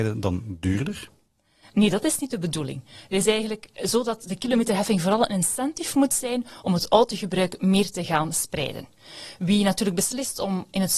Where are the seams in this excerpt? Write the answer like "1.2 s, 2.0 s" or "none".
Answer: none